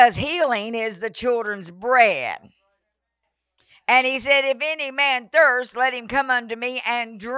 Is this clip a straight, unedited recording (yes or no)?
yes